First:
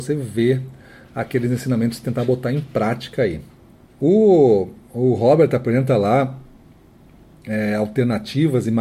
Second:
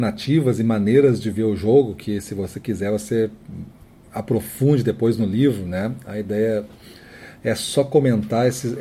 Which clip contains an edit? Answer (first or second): first